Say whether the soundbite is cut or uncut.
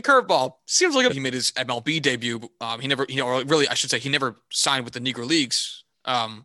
cut